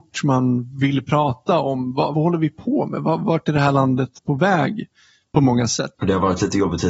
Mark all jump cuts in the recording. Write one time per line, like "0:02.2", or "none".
0:02.1
0:06.0